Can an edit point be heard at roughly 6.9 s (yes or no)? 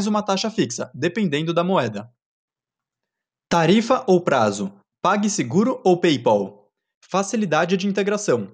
yes